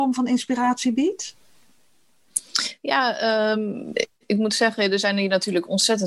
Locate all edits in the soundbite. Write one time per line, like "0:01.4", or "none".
none